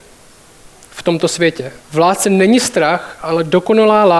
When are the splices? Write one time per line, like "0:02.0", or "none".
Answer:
0:01.8